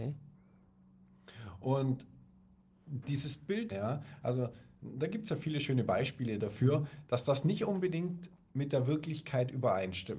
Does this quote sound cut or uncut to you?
cut